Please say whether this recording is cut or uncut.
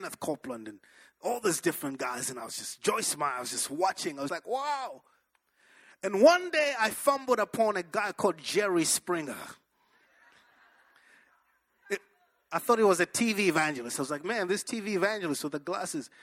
cut